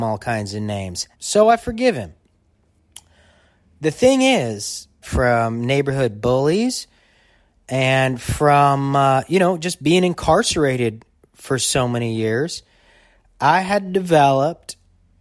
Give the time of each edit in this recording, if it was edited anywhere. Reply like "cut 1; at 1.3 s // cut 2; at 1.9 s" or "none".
cut 1; at 1.1 s // cut 2; at 5.0 s